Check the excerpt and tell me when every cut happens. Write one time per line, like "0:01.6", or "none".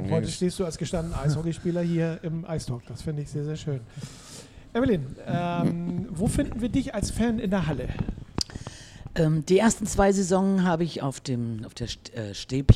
none